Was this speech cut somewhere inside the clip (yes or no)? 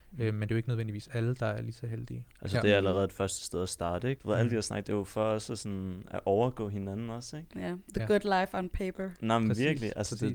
yes